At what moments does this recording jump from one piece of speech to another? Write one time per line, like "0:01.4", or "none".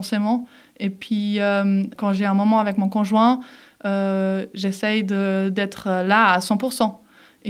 0:02.0